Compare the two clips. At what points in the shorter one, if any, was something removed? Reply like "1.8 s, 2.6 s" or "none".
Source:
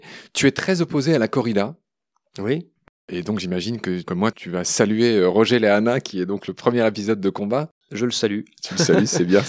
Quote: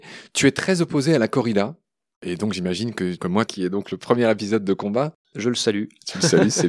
2.1 s, 3.5 s